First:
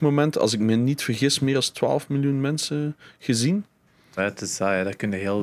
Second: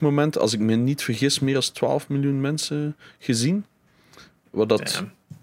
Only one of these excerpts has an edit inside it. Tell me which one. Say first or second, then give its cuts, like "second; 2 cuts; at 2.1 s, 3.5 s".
first; 1 cut; at 4.2 s